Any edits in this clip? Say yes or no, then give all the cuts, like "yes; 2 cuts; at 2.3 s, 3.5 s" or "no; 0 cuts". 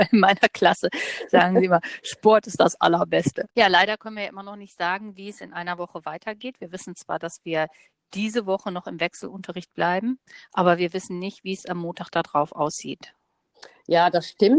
no; 0 cuts